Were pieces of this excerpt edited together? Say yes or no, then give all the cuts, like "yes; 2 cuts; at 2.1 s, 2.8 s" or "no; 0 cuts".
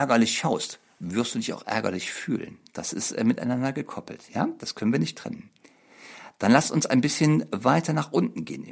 no; 0 cuts